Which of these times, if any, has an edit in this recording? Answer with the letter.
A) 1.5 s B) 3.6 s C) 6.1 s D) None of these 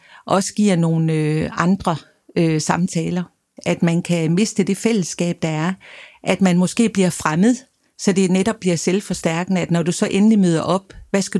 B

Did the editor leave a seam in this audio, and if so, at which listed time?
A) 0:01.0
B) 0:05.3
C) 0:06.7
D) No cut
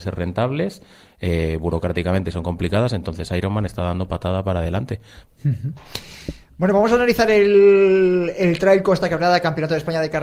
B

